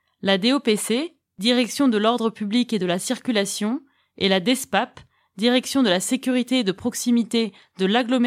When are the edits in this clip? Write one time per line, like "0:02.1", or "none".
none